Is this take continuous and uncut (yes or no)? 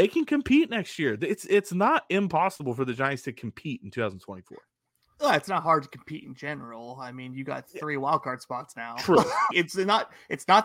no